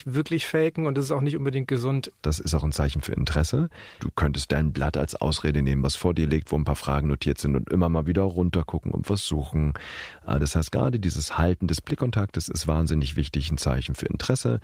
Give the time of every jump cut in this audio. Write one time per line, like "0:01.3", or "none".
0:02.2
0:04.0